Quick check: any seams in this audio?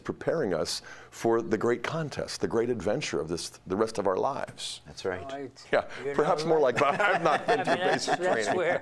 yes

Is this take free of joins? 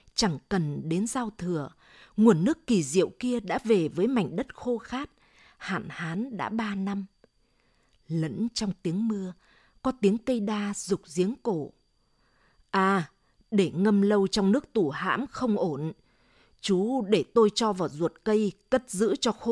no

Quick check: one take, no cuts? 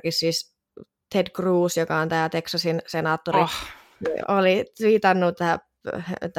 no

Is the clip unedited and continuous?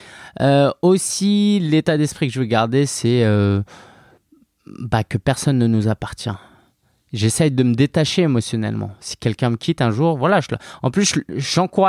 yes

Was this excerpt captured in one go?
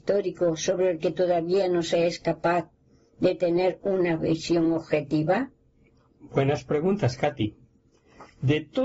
yes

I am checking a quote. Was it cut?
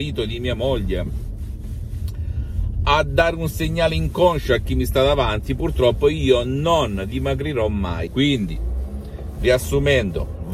yes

